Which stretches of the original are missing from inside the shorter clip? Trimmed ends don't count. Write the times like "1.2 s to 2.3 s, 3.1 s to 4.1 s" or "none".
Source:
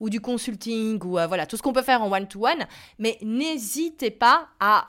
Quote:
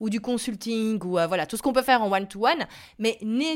none